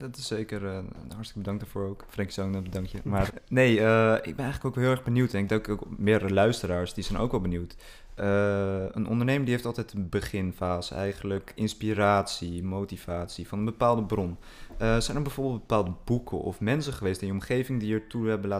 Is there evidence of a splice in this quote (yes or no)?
yes